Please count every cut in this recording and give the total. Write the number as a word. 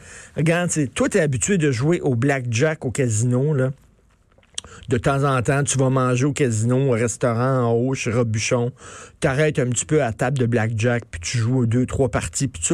zero